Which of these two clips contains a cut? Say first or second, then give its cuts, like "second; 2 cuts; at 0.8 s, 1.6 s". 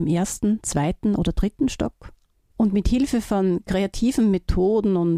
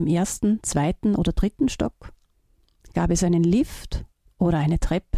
first; 1 cut; at 2.5 s